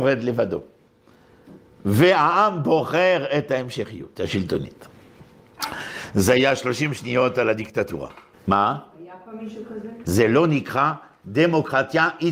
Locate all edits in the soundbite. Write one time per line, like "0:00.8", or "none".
0:08.3
0:10.0